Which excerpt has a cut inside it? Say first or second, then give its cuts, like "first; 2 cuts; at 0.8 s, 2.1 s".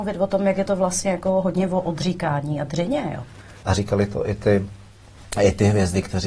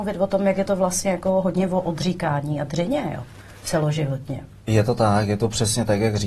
first; 1 cut; at 3.6 s